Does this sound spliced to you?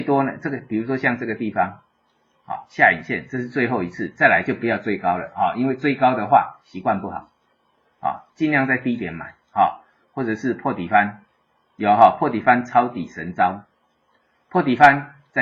yes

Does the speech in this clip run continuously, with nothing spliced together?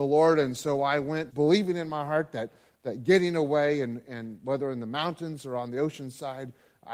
no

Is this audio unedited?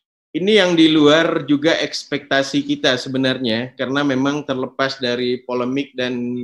yes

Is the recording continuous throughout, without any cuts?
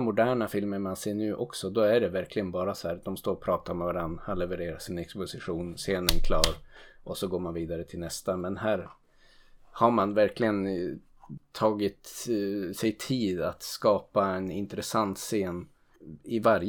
yes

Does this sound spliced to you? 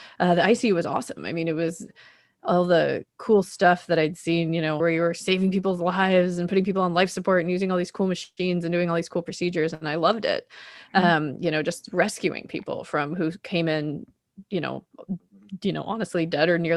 yes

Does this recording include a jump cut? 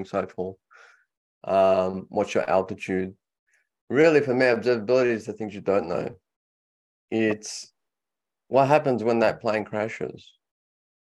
no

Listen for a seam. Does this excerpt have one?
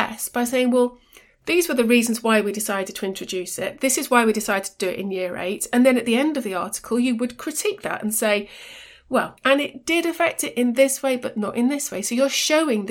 yes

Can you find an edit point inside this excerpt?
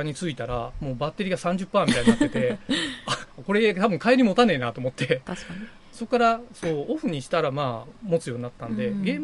yes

